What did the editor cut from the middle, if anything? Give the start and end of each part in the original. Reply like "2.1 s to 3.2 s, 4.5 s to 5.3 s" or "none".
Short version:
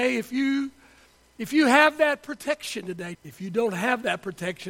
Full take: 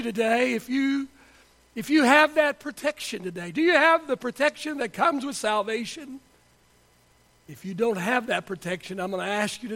3.5 s to 7.4 s